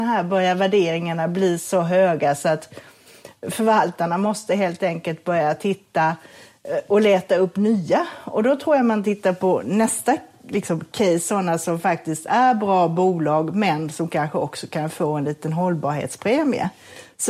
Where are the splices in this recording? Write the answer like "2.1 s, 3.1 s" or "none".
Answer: none